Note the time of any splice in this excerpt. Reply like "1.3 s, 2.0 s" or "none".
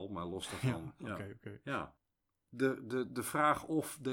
none